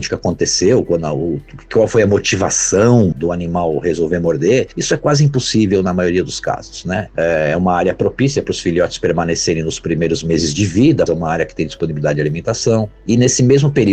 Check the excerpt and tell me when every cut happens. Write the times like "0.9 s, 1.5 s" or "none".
3.1 s, 7.1 s, 11.1 s